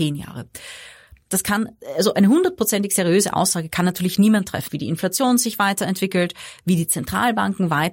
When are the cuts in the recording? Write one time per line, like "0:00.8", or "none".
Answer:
0:01.3
0:04.7